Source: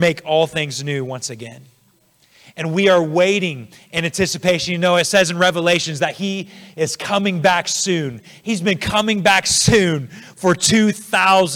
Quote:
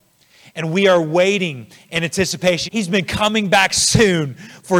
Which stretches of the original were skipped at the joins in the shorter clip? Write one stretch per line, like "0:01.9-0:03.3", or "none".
0:04.7-0:08.4